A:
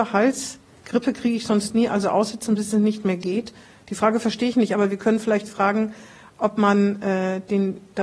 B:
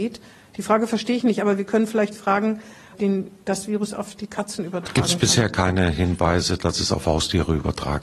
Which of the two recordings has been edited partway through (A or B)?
B